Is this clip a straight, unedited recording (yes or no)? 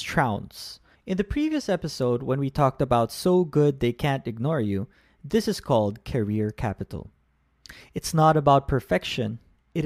no